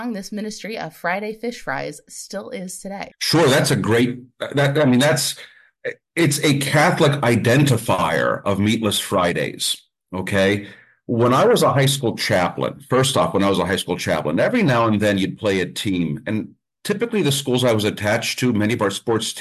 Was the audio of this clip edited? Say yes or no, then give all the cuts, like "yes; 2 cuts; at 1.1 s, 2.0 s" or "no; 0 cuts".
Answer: yes; 1 cut; at 3.1 s